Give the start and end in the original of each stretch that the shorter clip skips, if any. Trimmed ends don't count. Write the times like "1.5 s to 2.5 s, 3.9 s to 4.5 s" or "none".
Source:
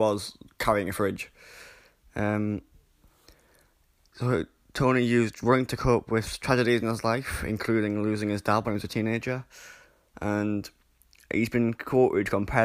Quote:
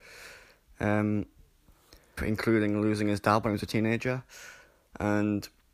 3.5 s to 7.4 s